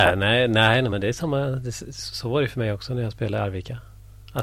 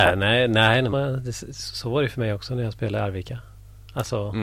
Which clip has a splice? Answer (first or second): second